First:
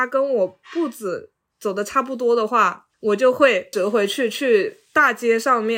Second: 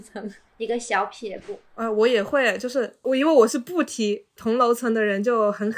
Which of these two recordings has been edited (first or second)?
first